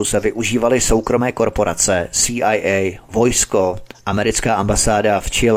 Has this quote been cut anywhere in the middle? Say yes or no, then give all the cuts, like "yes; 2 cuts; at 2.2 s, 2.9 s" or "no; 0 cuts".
no; 0 cuts